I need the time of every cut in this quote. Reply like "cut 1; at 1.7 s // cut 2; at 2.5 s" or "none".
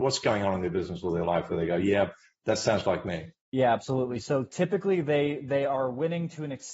cut 1; at 3.4 s